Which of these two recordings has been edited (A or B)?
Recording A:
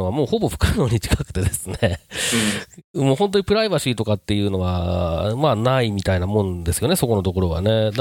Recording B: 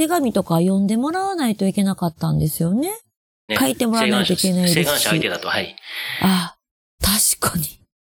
B